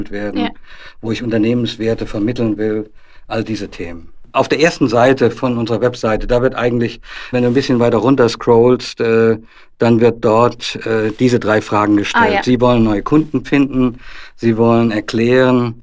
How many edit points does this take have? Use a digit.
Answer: 1